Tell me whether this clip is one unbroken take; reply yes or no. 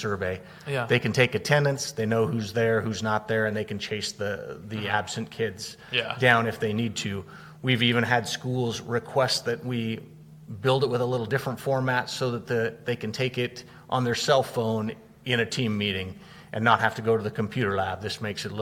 yes